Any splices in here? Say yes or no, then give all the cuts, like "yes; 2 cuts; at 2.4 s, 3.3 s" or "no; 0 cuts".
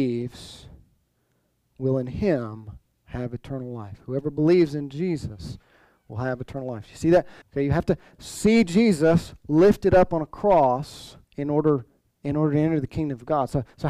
yes; 2 cuts; at 7.4 s, 11.2 s